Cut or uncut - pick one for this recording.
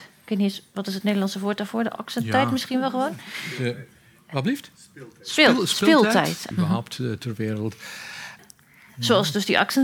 cut